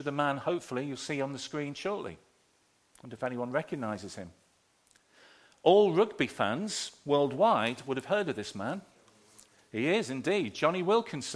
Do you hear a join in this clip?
no; 0 cuts

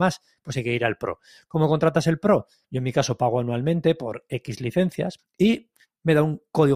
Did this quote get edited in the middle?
yes; 2 cuts; at 2.6 s, 5.2 s

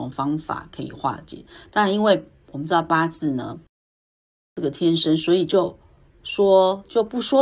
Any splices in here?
no; 0 cuts

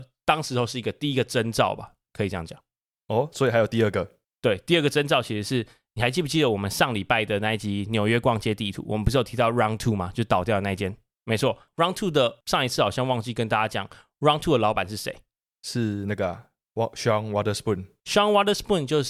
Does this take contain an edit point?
yes; 2 cuts; at 11.1 s, 18.0 s

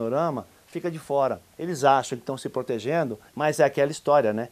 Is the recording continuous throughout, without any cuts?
no; 2 cuts; at 1.5 s, 3.3 s

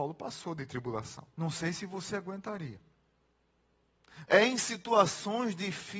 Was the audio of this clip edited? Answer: yes; 2 cuts; at 1.3 s, 4.3 s

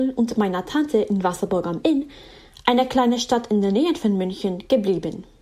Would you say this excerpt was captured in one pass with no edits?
yes; 0 cuts

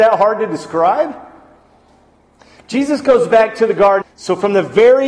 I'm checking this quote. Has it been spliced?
yes; 1 cut; at 4.0 s

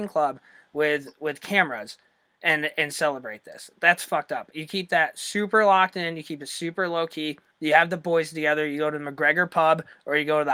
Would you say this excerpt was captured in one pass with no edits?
yes; 0 cuts

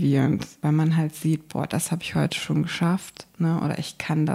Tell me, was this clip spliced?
no; 0 cuts

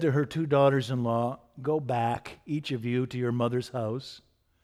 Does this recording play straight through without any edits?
yes; 0 cuts

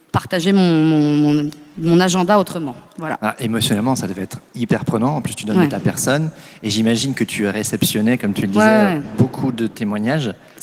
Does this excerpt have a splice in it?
no; 0 cuts

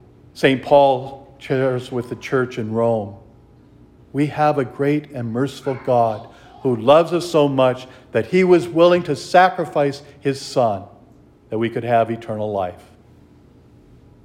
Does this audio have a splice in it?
no; 0 cuts

